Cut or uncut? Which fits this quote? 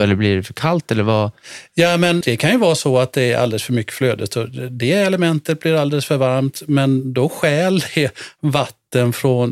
cut